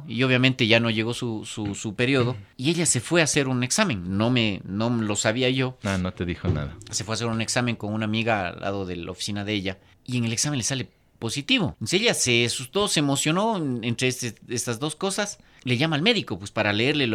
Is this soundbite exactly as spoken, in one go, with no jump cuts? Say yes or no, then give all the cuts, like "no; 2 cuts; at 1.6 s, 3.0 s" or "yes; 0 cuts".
yes; 0 cuts